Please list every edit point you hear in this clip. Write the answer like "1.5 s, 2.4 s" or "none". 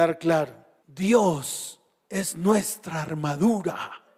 none